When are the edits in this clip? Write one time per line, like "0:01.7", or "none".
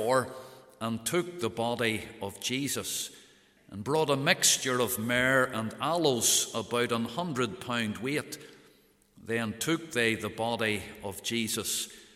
0:03.6